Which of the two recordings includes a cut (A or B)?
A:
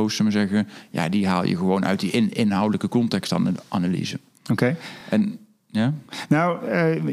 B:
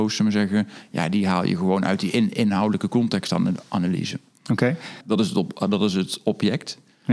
B